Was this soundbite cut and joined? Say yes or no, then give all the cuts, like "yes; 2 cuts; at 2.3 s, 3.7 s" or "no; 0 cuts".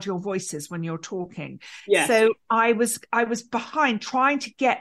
no; 0 cuts